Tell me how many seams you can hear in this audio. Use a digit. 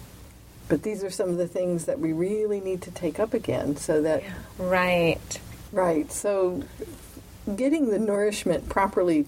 2